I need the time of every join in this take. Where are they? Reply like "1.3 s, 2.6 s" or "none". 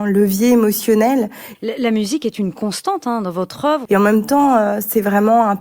1.5 s, 3.9 s